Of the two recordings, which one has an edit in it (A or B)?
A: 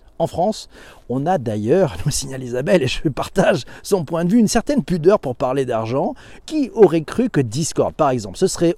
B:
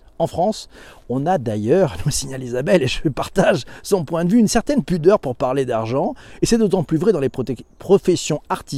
A